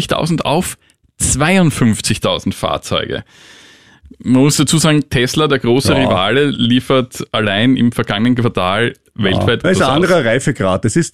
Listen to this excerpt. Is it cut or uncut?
cut